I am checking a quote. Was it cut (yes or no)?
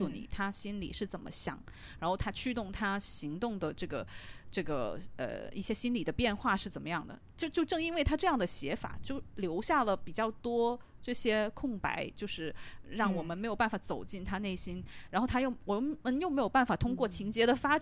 no